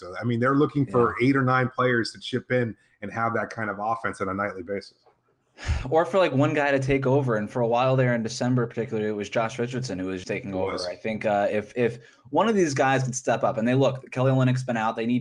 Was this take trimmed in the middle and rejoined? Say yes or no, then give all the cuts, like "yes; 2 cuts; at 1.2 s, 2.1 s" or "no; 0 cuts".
yes; 1 cut; at 10.2 s